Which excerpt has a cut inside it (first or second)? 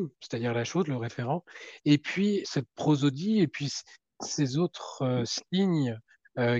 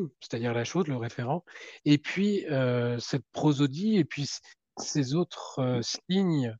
first